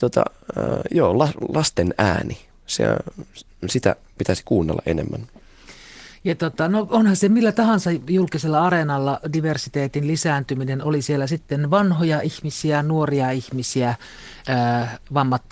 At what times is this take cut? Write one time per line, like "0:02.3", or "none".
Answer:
0:14.4

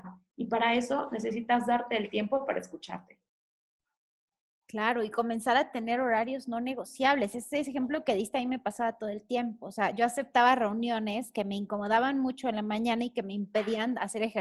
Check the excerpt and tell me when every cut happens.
none

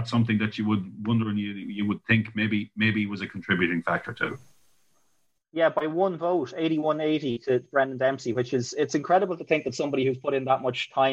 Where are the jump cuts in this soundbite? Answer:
none

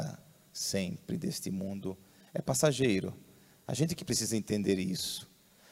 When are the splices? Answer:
none

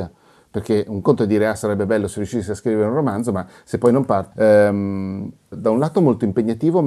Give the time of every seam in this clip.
0:04.3
0:05.5

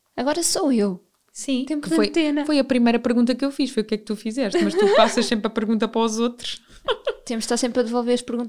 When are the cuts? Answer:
none

